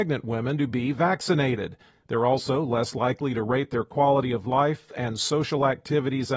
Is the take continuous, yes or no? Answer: no